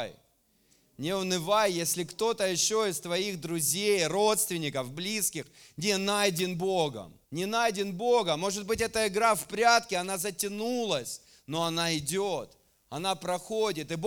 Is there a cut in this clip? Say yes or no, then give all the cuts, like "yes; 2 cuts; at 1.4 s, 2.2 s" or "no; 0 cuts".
yes; 1 cut; at 7.2 s